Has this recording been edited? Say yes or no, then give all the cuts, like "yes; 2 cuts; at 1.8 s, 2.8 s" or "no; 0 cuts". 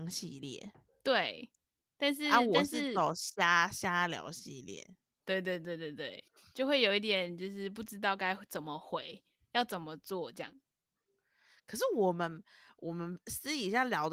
no; 0 cuts